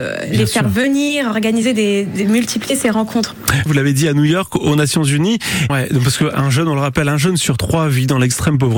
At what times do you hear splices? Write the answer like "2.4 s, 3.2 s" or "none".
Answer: 3.7 s, 5.7 s